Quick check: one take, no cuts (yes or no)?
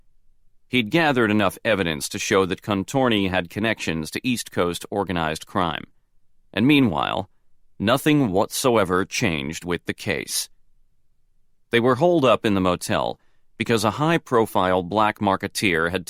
no